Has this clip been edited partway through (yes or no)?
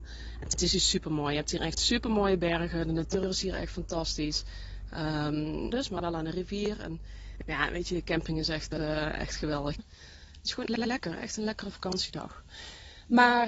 yes